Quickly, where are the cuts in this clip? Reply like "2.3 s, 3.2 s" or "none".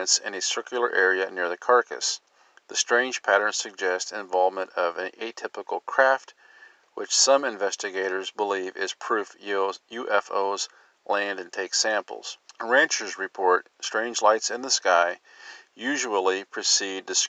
12.5 s